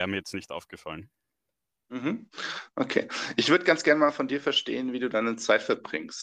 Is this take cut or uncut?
uncut